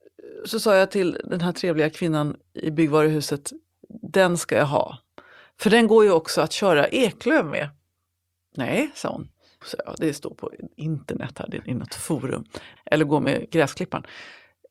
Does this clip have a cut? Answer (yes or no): yes